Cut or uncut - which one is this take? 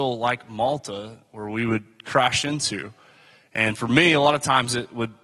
uncut